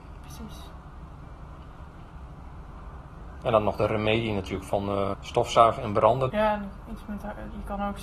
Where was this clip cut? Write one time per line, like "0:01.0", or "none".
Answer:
0:03.4
0:05.1
0:06.3